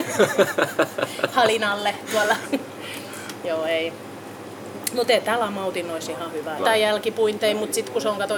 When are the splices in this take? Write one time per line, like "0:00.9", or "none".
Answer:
0:06.6